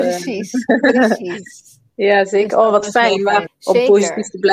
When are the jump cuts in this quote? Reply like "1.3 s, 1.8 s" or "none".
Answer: 3.5 s